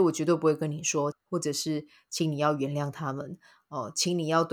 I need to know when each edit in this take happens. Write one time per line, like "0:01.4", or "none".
0:01.1